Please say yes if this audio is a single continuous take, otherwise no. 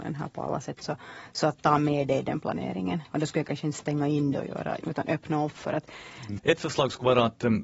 no